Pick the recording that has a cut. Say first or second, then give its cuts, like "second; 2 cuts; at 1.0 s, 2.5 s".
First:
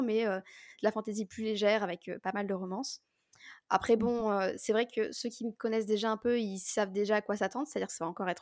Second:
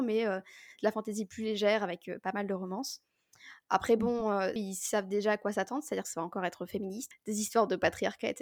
second; 2 cuts; at 4.6 s, 7.1 s